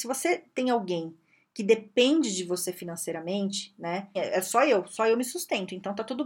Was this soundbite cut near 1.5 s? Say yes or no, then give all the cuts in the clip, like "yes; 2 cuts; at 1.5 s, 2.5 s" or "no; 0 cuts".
no; 1 cut; at 4.2 s